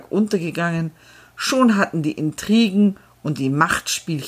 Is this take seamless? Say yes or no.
yes